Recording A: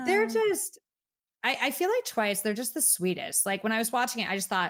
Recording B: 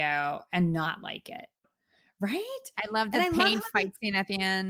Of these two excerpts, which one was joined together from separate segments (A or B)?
B